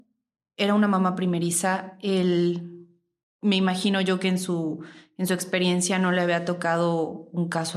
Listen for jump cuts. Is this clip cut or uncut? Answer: cut